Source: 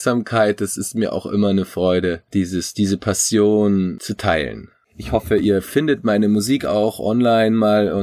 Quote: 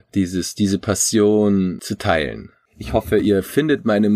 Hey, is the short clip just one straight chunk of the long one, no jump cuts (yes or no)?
yes